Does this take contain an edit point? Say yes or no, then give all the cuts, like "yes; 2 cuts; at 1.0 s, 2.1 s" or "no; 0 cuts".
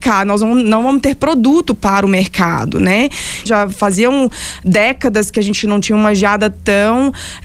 yes; 1 cut; at 3.5 s